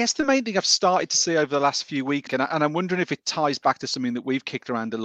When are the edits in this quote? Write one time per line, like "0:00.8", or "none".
0:02.3